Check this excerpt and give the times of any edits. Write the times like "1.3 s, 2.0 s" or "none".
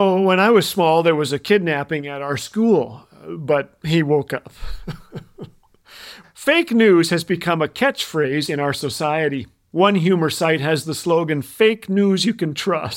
6.2 s